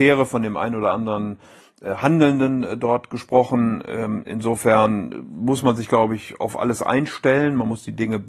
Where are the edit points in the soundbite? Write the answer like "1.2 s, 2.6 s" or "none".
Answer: none